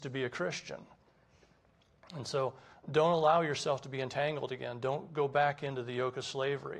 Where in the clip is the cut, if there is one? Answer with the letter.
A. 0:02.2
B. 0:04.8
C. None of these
C